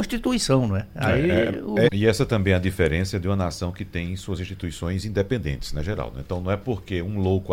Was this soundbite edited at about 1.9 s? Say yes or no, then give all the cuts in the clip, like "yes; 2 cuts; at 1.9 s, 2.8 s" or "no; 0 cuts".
yes; 1 cut; at 1.9 s